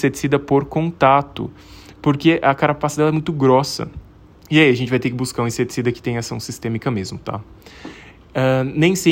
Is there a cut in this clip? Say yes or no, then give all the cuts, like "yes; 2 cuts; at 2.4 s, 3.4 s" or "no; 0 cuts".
no; 0 cuts